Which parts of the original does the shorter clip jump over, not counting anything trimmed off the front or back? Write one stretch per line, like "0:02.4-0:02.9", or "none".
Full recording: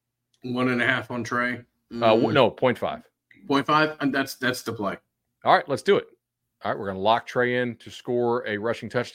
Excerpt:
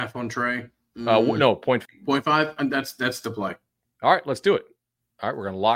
0:02.8-0:03.3